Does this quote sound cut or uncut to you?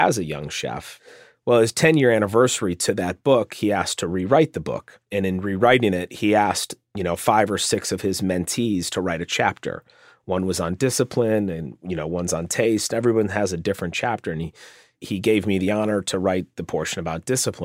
uncut